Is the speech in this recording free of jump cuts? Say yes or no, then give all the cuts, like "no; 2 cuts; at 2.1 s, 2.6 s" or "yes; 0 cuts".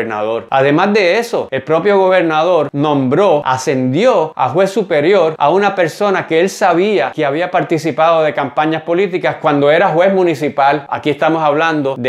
no; 1 cut; at 10.9 s